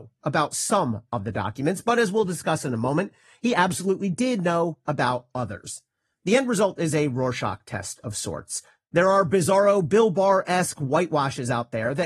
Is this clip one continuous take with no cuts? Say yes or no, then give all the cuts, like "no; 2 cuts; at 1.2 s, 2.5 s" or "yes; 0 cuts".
yes; 0 cuts